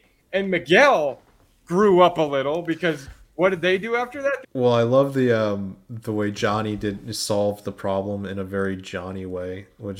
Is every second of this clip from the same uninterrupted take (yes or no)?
no